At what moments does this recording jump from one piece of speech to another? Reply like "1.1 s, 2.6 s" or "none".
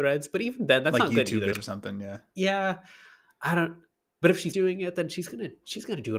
1.5 s, 4.5 s